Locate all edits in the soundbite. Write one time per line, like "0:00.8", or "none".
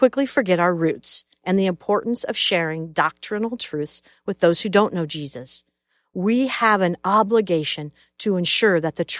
none

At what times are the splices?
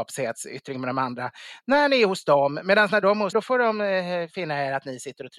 0:03.3

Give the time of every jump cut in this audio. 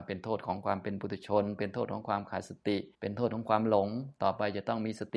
0:02.9

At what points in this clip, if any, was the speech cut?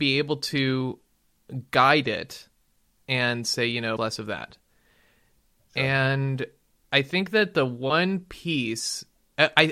0:04.0

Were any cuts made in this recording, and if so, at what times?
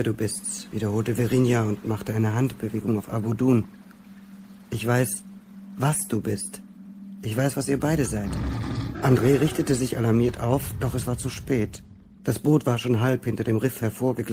0:08.9

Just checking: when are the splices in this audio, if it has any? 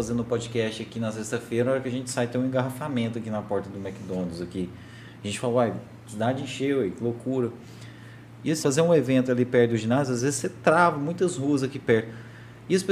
0:08.6

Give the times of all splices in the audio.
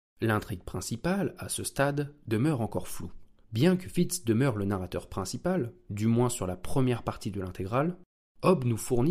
0:03.4

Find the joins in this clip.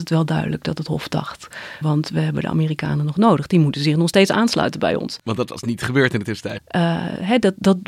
0:01.8
0:06.6

